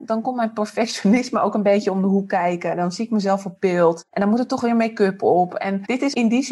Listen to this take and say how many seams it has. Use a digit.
0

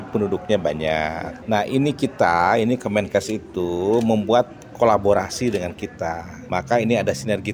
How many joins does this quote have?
1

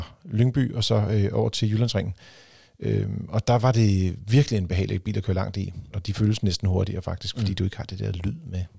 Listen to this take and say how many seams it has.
1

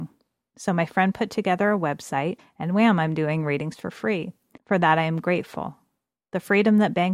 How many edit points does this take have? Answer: 2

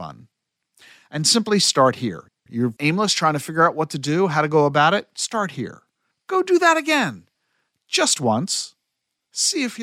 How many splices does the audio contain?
1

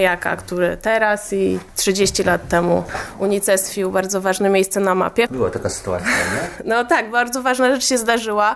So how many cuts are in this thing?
1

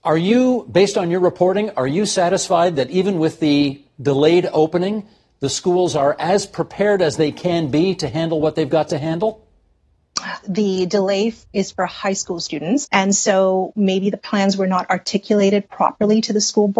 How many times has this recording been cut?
2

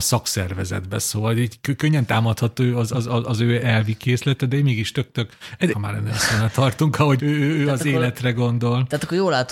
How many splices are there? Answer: 2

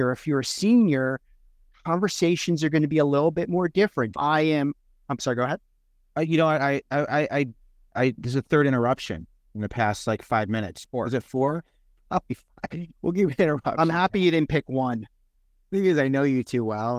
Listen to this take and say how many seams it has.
2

